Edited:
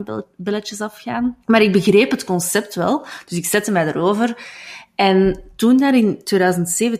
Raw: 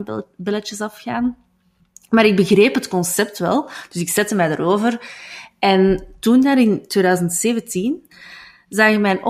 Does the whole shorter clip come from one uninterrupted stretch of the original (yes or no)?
no